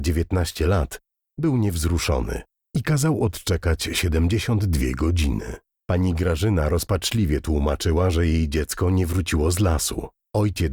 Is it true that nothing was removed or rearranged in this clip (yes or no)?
yes